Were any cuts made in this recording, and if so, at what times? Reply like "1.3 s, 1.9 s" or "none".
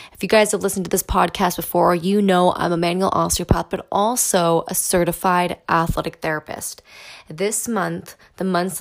none